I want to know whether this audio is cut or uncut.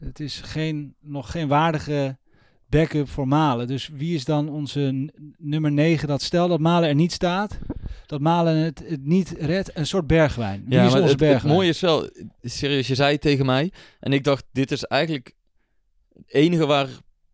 uncut